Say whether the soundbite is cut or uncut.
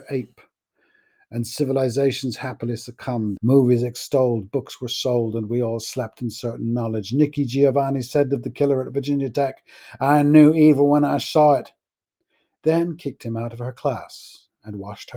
cut